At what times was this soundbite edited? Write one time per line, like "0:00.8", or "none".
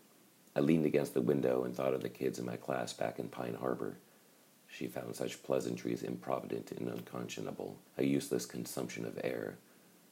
0:04.5
0:07.9